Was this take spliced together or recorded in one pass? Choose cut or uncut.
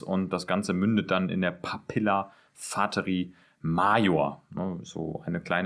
uncut